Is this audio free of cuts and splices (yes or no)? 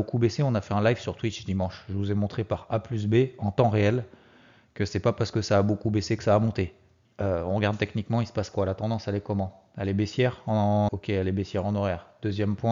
no